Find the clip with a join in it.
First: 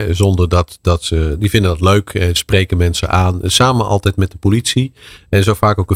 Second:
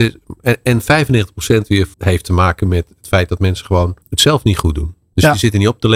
second; 2 cuts; at 1.9 s, 4.0 s

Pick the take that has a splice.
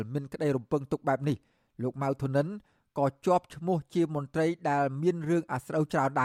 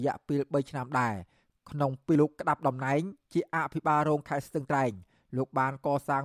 second; 1 cut; at 2.2 s

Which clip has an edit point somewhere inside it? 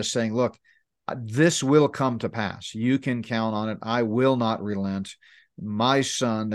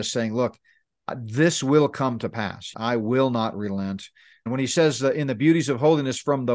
second; 2 cuts; at 2.7 s, 4.5 s

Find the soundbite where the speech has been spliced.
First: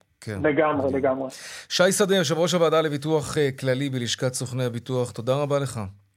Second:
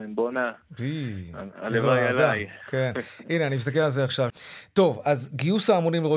second; 1 cut; at 4.3 s

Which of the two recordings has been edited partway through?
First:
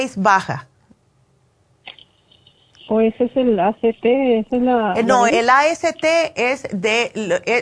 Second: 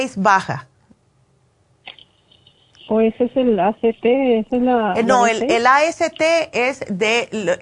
first; 1 cut; at 5.3 s

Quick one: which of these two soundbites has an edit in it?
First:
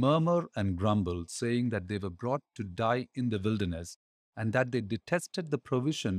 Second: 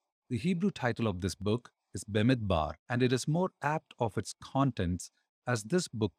second; 1 cut; at 2.8 s

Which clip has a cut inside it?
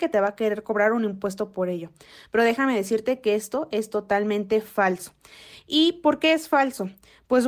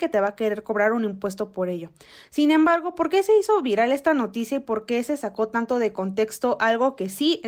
second; 1 cut; at 2.2 s

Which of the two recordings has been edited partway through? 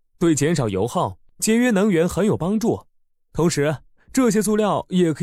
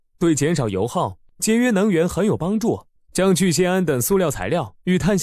second; 1 cut; at 3.0 s

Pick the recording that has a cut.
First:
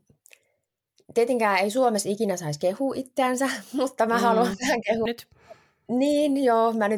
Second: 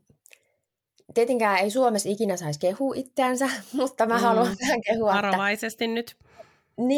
first; 1 cut; at 5.1 s

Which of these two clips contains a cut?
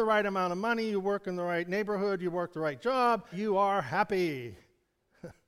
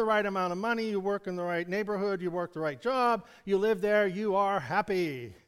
first; 1 cut; at 3.3 s

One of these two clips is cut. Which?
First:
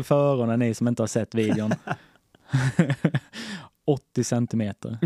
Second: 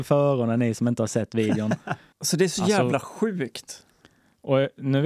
second; 1 cut; at 2.1 s

